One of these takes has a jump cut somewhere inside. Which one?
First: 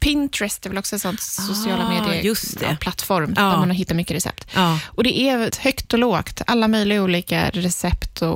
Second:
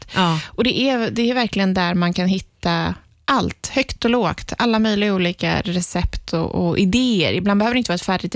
first; 1 cut; at 5.5 s

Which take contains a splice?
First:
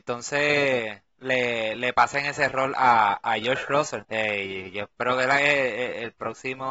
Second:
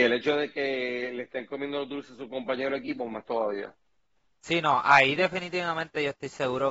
first; 1 cut; at 4.0 s

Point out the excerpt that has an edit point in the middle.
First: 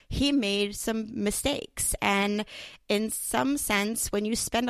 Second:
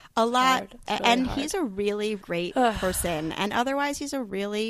second; 1 cut; at 2.2 s

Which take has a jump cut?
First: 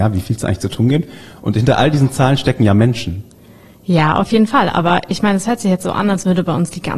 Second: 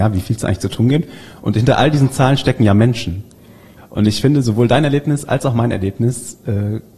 second; 1 cut; at 3.8 s

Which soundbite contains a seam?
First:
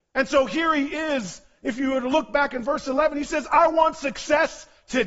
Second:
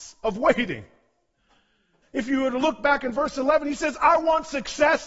second; 1 cut; at 2.0 s

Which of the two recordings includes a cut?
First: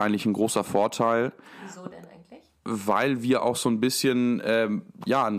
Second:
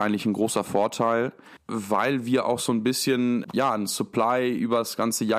second; 2 cuts; at 1.6 s, 3.4 s

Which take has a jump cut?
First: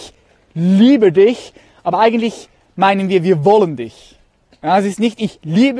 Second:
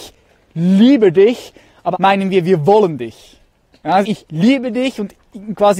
second; 2 cuts; at 1.9 s, 4.0 s

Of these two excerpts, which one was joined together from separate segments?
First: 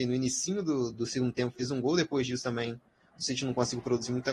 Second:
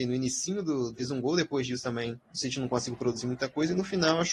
second; 2 cuts; at 0.9 s, 2.3 s

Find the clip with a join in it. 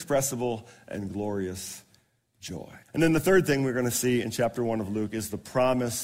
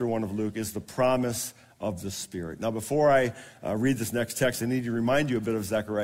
first; 1 cut; at 2.8 s

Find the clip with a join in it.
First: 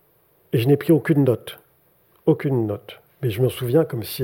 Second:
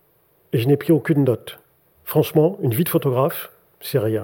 second; 1 cut; at 1.9 s

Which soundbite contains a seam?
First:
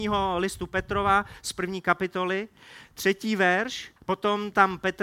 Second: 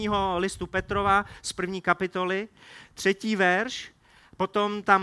first; 1 cut; at 4.0 s

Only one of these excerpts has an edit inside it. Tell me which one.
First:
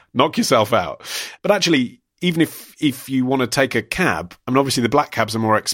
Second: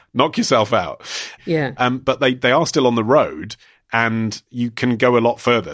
second; 1 cut; at 1.4 s

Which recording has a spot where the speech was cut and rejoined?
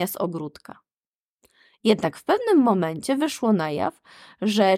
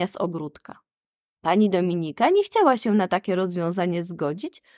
second; 1 cut; at 1.3 s

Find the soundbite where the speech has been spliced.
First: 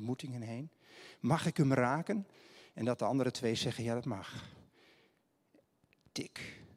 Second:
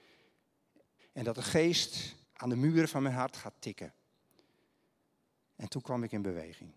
second; 3 cuts; at 1.0 s, 2.2 s, 5.4 s

